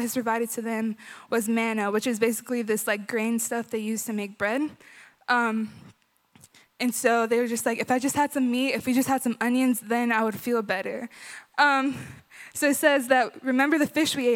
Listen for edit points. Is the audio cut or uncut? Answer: cut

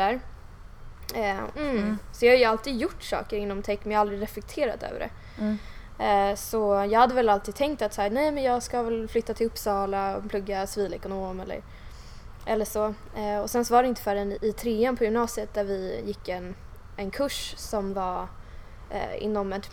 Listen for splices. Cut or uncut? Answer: cut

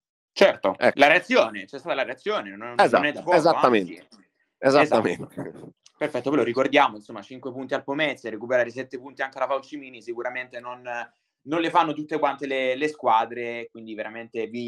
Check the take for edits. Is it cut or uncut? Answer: uncut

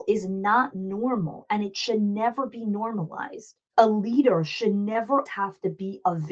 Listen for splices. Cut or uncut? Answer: cut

